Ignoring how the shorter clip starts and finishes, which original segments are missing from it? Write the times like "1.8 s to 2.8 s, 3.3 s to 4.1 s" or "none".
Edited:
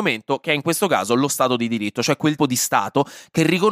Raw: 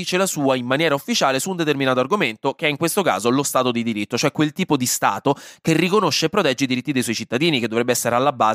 4.5 s to 4.7 s